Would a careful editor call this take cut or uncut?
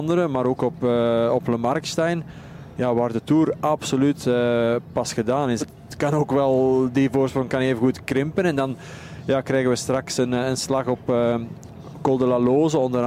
cut